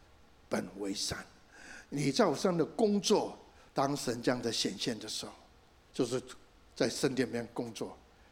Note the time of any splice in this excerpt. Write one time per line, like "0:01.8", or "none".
0:03.7
0:05.9